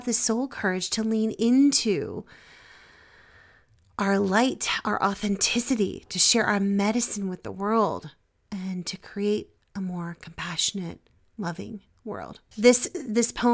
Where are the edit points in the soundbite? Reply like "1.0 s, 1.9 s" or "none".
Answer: 12.5 s